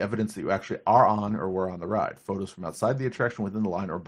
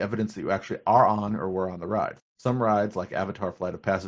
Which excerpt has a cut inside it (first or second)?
second